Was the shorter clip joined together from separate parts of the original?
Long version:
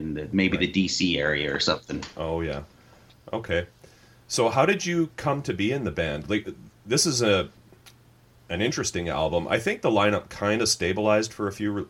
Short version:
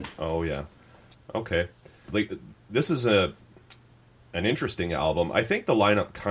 yes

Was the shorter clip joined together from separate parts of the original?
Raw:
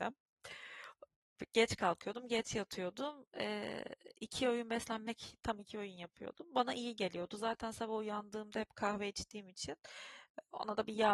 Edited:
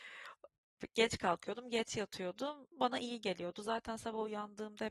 yes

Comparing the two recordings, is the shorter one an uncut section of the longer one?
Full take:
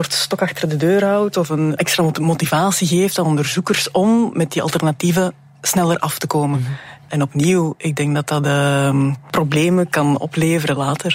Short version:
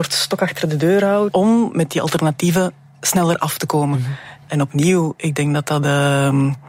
no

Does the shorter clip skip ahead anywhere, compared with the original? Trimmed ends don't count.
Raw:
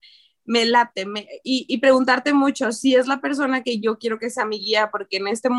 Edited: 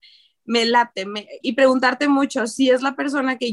yes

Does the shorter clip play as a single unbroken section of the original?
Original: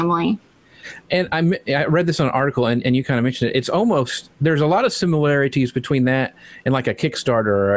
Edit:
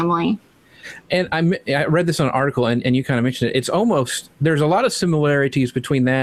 yes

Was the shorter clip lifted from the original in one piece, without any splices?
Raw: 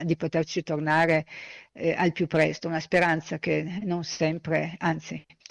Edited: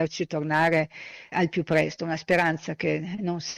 no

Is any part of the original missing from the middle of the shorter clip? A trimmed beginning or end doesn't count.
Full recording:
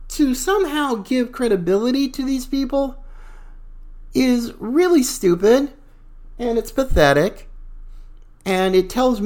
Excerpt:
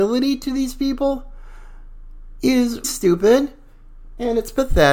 yes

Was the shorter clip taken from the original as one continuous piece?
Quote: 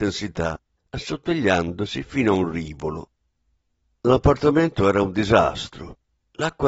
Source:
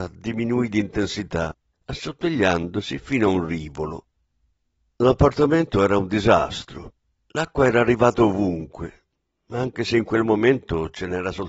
yes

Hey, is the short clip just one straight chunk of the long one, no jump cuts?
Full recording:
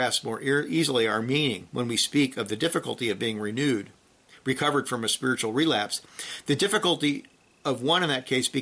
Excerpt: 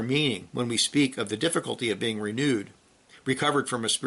yes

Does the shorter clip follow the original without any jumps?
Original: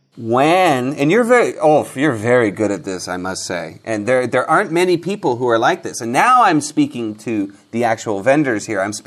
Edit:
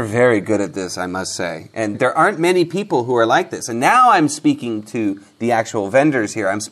no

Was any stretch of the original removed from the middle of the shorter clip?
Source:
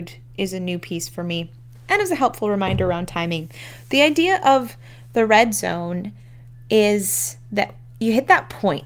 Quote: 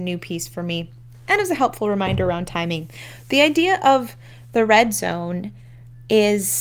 no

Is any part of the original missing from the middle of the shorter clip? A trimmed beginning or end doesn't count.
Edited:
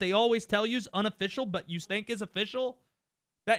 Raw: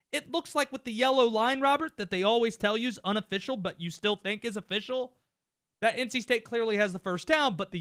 yes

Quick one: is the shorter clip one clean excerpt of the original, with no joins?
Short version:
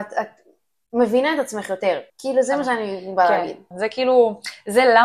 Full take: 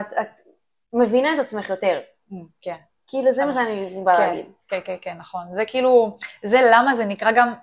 no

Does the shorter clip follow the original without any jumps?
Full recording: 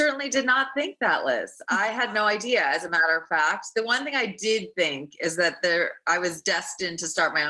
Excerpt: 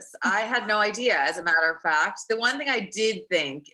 yes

